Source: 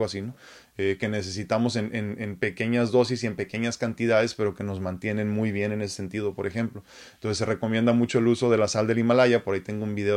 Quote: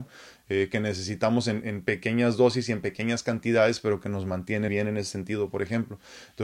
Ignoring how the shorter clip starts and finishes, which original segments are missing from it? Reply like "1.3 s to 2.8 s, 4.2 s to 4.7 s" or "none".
1.9 s to 2.2 s, 5.2 s to 5.5 s